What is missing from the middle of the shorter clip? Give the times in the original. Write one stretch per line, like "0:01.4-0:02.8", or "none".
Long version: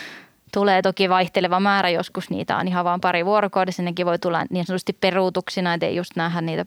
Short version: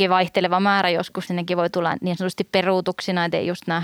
0:02.3-0:03.8